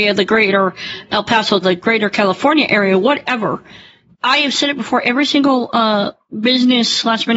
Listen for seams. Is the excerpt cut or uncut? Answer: cut